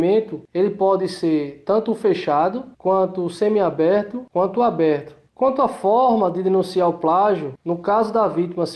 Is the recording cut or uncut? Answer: uncut